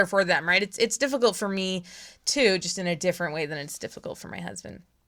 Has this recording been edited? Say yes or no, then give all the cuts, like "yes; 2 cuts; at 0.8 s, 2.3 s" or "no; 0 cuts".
no; 0 cuts